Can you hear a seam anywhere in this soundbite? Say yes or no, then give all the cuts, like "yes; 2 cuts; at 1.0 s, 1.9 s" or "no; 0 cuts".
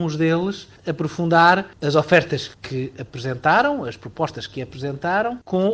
no; 0 cuts